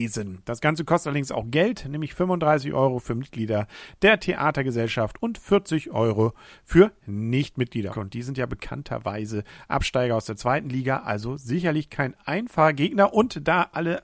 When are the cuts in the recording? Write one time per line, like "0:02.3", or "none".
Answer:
0:07.9